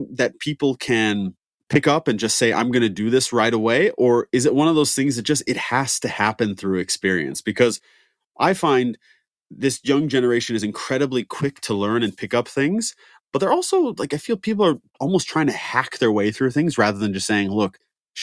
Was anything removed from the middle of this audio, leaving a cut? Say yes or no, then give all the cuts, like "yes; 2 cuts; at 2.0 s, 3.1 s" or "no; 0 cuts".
no; 0 cuts